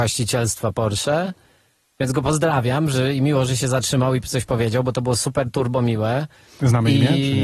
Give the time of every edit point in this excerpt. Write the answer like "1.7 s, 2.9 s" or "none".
none